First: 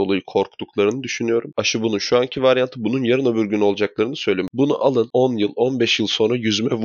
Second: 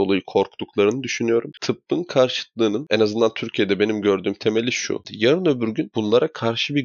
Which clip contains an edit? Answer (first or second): second